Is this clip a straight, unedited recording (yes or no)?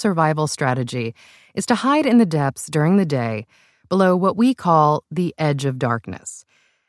yes